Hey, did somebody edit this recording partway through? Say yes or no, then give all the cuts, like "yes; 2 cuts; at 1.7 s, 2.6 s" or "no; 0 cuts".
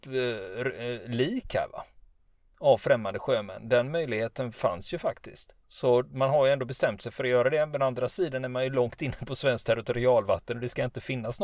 yes; 1 cut; at 5.6 s